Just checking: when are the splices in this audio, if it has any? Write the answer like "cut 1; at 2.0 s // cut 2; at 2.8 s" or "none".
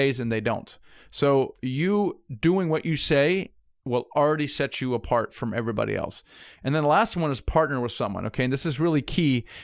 none